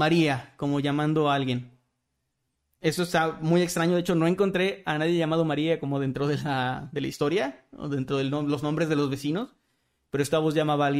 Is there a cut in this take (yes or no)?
no